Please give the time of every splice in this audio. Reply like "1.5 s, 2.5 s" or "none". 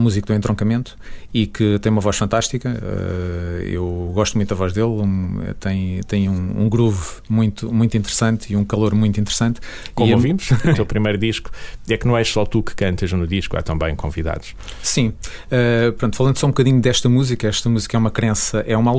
10.7 s